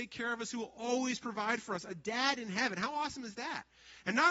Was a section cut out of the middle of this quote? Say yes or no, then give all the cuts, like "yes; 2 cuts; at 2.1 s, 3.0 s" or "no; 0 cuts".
no; 0 cuts